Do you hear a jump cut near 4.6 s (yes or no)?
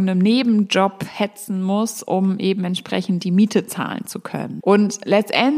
yes